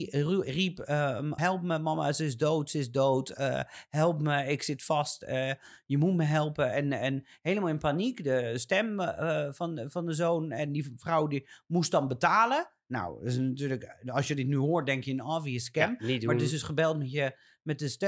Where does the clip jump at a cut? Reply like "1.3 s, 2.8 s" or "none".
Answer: 1.4 s